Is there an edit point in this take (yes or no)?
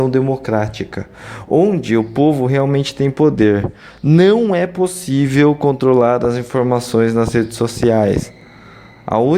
no